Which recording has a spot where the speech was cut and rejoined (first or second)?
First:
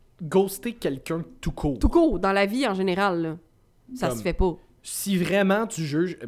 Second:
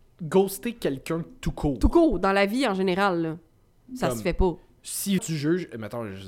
second